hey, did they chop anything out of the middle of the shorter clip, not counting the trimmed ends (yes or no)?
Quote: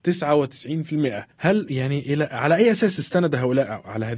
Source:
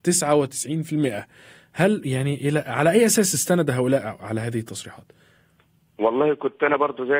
yes